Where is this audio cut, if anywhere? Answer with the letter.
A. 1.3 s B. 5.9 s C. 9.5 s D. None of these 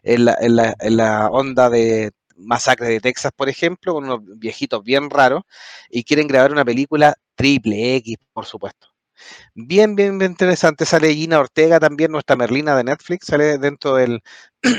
D